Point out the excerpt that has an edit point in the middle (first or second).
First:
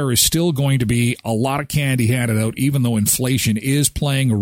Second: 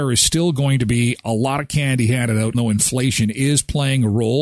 second